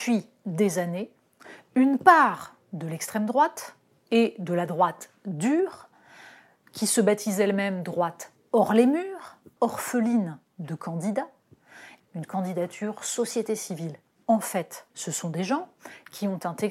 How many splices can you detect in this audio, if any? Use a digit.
3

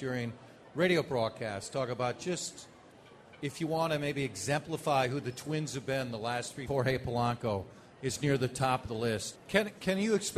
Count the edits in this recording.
2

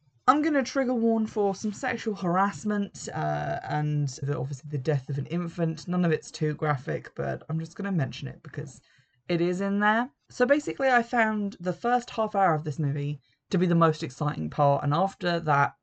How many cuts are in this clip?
1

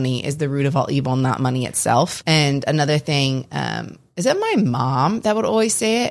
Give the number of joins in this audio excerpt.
1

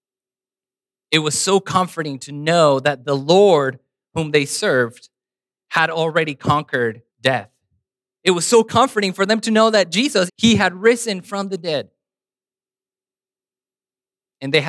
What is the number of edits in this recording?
2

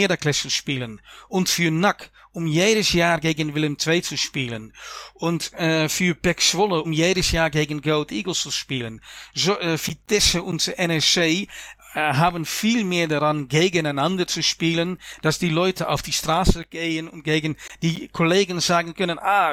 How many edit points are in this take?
1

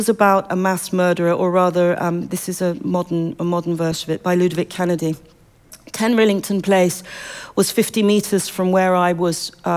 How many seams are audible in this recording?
0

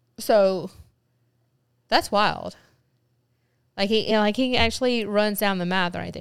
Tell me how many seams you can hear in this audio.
0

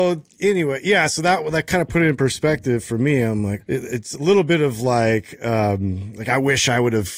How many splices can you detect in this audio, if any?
1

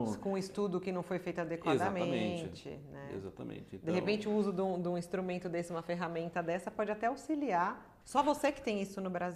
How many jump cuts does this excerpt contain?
1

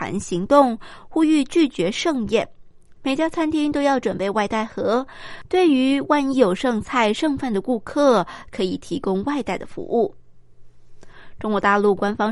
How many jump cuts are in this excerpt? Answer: 1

